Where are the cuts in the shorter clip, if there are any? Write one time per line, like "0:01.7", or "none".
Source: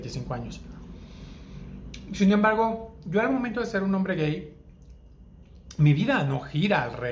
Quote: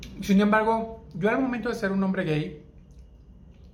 none